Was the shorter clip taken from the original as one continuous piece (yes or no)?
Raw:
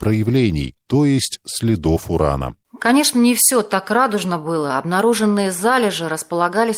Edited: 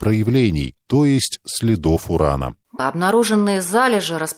no